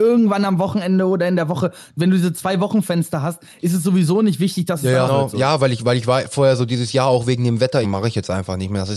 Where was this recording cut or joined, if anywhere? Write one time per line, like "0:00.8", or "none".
0:05.1
0:07.8